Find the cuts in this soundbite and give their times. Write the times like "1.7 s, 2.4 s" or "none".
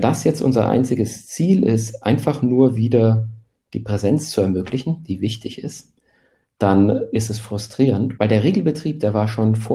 8.2 s